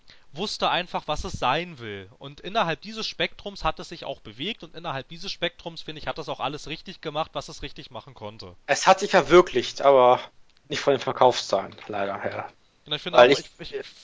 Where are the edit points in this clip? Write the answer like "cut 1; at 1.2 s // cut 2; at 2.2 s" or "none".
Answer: none